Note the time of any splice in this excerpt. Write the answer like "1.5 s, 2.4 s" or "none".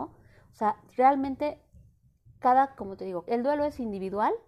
3.3 s